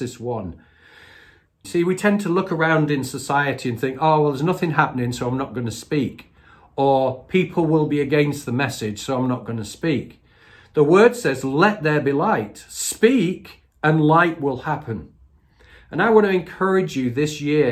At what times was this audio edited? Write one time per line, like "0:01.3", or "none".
0:01.6